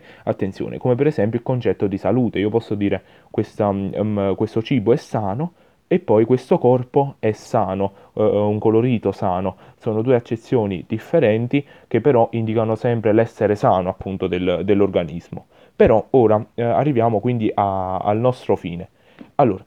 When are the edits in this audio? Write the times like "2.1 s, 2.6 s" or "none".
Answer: none